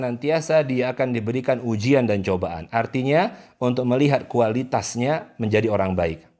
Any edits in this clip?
no; 0 cuts

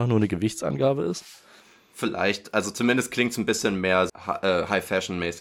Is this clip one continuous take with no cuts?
no; 1 cut; at 4.1 s

